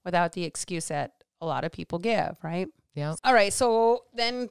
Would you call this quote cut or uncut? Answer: uncut